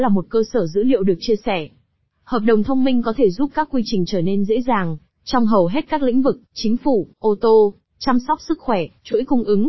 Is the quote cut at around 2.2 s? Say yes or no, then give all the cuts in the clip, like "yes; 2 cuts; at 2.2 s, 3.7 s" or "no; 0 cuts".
no; 1 cut; at 7.1 s